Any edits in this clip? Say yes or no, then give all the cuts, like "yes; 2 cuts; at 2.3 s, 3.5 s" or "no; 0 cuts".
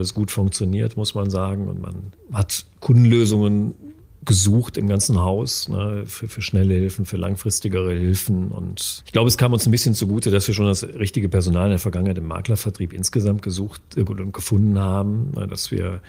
no; 0 cuts